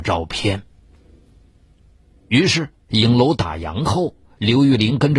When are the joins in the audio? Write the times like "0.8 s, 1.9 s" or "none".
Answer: 2.9 s